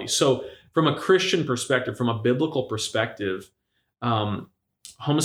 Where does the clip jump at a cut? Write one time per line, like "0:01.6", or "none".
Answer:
none